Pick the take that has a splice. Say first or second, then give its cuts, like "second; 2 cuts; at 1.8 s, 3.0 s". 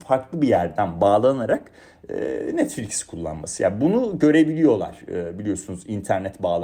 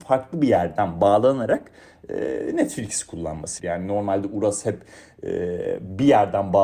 second; 1 cut; at 3.6 s